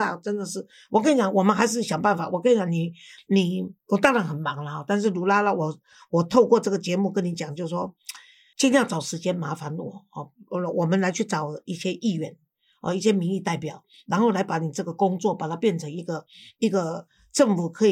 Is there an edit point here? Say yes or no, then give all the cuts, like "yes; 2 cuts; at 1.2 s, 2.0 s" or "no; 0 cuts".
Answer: no; 0 cuts